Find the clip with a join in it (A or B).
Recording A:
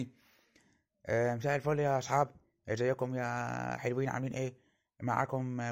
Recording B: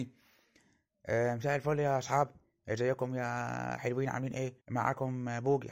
B